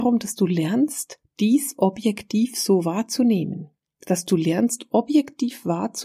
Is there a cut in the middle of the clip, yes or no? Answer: no